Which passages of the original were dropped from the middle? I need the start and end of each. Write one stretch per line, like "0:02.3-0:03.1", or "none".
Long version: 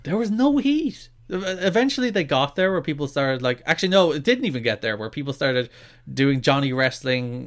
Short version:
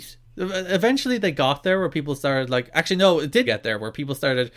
0:04.4-0:04.6